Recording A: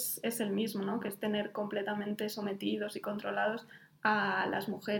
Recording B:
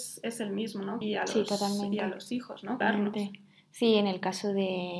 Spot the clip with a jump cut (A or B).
B